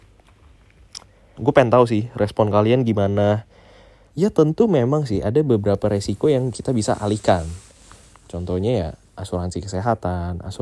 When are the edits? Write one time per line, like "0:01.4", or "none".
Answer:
0:01.4
0:04.1